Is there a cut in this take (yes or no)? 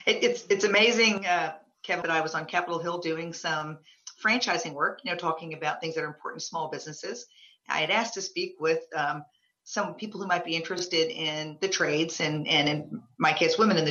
yes